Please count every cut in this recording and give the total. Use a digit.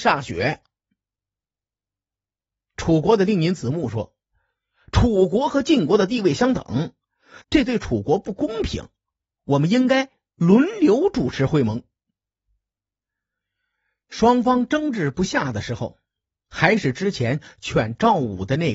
1